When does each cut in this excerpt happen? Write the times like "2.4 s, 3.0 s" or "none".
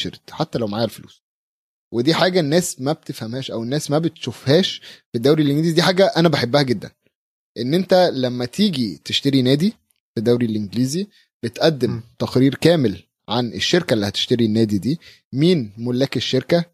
none